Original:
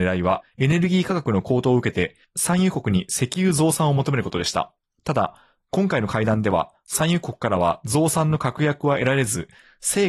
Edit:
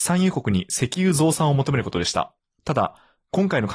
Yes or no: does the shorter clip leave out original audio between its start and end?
no